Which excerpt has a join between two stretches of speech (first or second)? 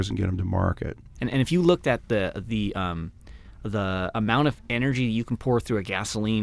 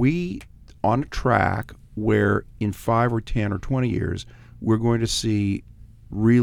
first